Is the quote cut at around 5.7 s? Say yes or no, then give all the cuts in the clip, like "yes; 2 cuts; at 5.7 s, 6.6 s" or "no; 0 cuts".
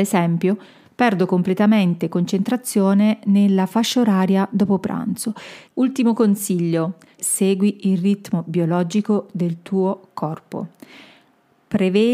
yes; 2 cuts; at 5.7 s, 7.2 s